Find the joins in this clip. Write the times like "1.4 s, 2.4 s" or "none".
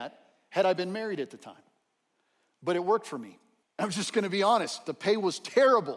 3.6 s